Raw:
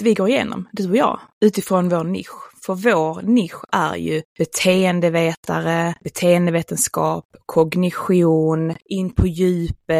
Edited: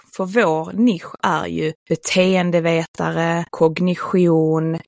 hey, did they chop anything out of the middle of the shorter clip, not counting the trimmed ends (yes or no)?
yes